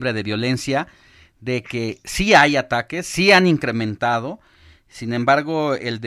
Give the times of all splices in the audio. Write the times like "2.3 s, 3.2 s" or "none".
none